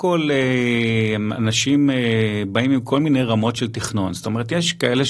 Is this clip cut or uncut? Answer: uncut